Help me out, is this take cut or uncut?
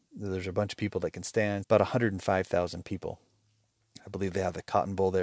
cut